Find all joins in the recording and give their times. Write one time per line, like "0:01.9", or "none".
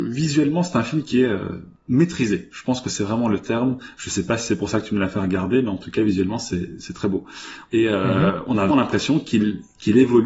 0:07.7
0:08.7